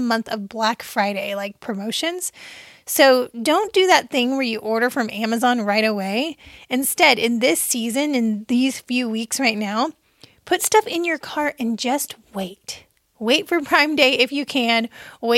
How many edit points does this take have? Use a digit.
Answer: 0